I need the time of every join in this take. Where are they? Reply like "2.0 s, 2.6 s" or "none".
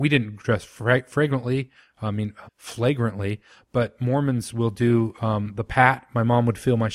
2.5 s

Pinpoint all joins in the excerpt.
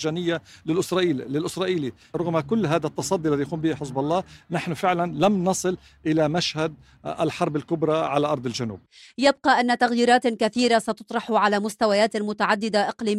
none

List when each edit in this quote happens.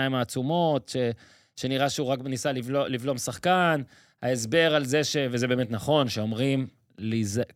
none

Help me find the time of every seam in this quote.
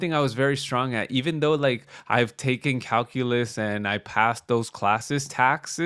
none

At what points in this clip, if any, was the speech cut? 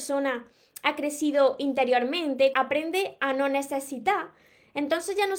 2.5 s

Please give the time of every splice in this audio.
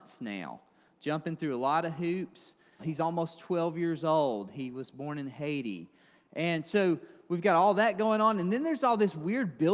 2.8 s

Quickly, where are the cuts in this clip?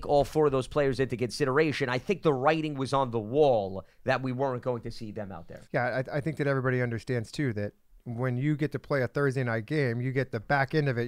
5.6 s

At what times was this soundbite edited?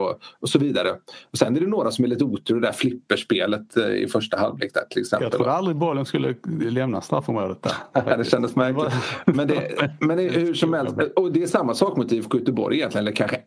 none

